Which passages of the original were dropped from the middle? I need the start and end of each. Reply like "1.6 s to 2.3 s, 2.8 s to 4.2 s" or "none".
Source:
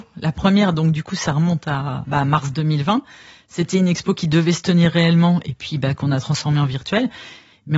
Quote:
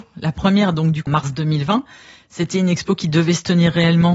1.1 s to 2.3 s